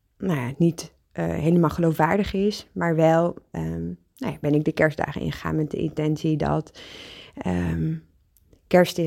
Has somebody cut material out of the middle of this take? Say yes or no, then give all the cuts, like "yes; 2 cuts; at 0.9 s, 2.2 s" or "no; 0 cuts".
no; 0 cuts